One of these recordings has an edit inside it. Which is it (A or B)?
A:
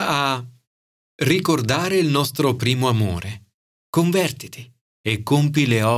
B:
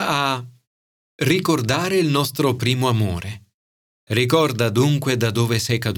A